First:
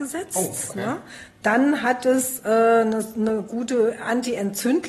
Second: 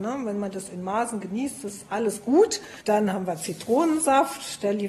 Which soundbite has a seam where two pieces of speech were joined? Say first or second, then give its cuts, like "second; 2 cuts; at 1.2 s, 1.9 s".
second; 1 cut; at 2.8 s